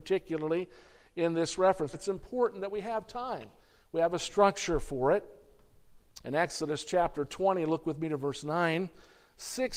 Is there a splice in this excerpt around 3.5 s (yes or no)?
no